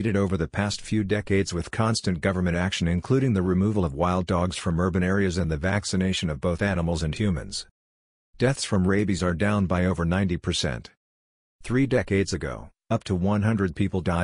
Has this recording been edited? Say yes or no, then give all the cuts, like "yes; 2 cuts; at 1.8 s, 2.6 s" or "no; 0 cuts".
no; 0 cuts